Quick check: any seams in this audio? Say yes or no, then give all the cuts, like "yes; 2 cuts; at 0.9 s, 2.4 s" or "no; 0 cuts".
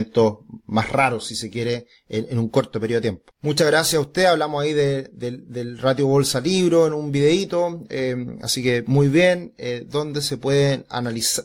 no; 0 cuts